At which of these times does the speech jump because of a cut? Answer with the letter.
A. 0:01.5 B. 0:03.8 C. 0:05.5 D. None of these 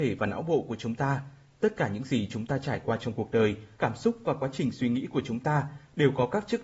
B